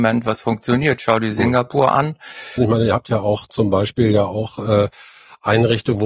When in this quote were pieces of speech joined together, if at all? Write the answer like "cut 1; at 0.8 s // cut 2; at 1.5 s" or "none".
cut 1; at 2.6 s

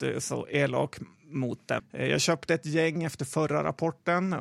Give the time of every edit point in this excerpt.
cut 1; at 1.8 s

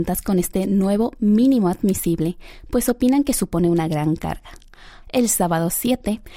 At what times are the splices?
cut 1; at 5.0 s

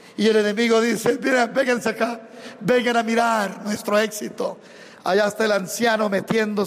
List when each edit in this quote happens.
none

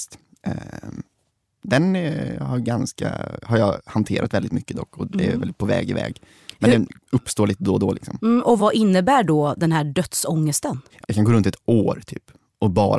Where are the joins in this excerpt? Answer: cut 1; at 8.6 s // cut 2; at 11.0 s

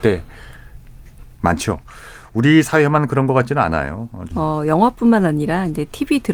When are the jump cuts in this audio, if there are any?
cut 1; at 4.3 s

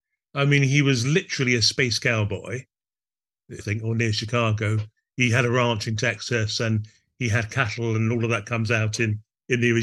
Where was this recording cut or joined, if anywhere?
cut 1; at 3.6 s

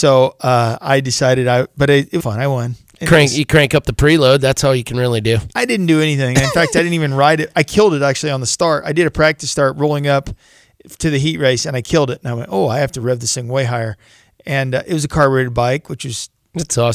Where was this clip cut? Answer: cut 1; at 2.2 s

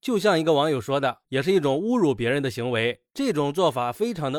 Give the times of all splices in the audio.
cut 1; at 1.2 s

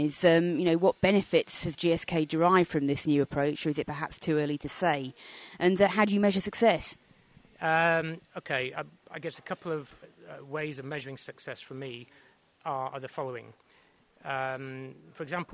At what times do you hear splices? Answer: none

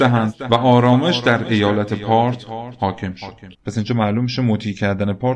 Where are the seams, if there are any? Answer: cut 1; at 3.5 s

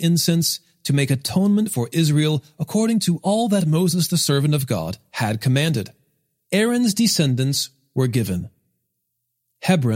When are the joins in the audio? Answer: cut 1; at 6.5 s

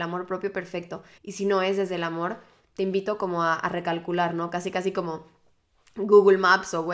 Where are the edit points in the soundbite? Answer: cut 1; at 1.2 s

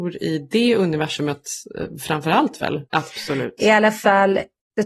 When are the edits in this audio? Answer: cut 1; at 2.8 s

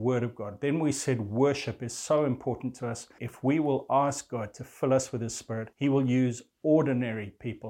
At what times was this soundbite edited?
cut 1; at 3.2 s // cut 2; at 5.7 s

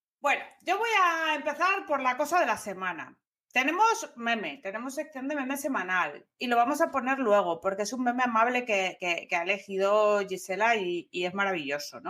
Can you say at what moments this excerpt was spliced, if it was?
none

